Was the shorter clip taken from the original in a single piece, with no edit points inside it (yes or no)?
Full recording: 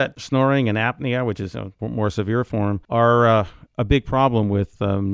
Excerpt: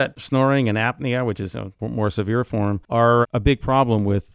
no